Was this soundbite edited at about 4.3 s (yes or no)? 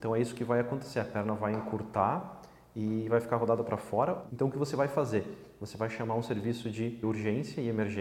no